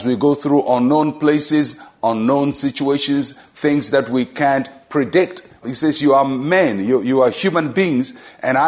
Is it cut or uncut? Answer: cut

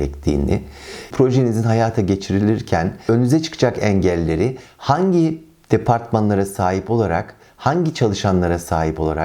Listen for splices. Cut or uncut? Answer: cut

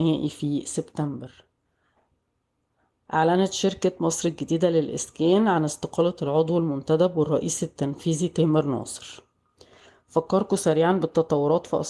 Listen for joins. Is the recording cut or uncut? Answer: uncut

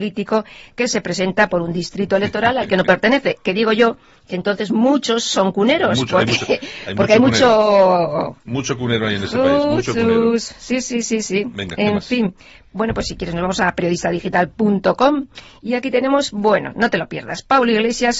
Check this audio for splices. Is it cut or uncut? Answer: uncut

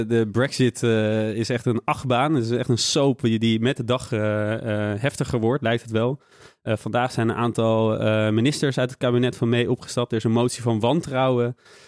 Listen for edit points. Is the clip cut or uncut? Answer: uncut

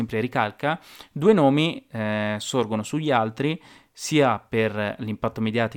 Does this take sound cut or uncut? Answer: uncut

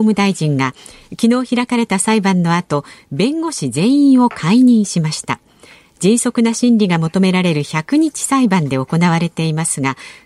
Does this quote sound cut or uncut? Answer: uncut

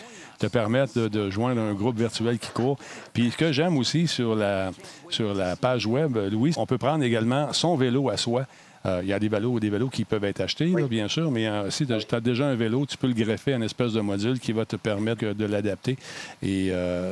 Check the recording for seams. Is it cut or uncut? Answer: cut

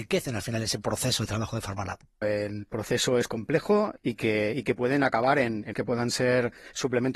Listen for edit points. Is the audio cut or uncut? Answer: cut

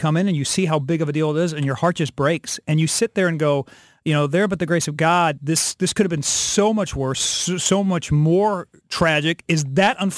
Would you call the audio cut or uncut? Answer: uncut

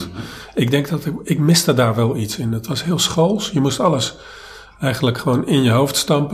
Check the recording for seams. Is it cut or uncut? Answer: uncut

